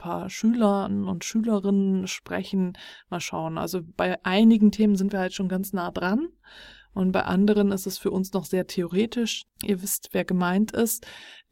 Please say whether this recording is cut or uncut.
cut